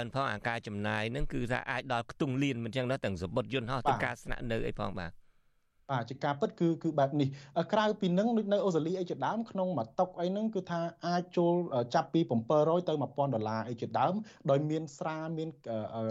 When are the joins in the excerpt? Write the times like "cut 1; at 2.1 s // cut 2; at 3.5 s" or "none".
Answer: none